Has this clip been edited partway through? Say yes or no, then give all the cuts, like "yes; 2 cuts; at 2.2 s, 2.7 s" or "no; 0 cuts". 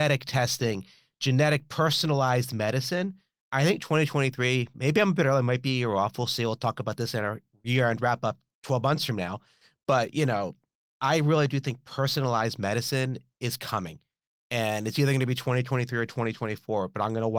no; 0 cuts